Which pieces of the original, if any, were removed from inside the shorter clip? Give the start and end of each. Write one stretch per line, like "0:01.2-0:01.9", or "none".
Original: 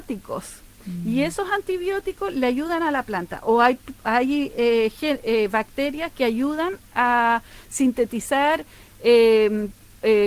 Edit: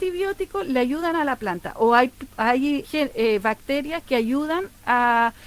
0:04.5-0:04.9